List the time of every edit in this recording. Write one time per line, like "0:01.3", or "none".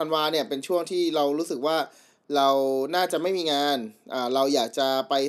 none